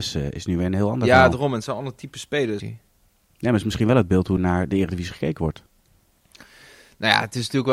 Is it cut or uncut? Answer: cut